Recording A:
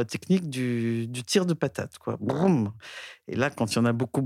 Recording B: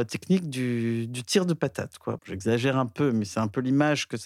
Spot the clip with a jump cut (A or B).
B